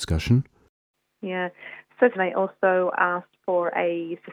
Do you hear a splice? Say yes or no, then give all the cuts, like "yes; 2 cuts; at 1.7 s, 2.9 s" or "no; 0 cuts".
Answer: yes; 1 cut; at 2.1 s